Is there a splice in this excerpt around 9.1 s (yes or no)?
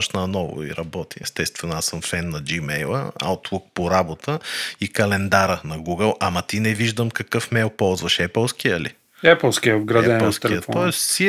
no